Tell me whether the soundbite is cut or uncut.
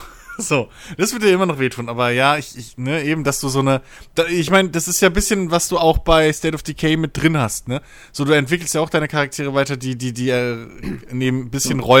uncut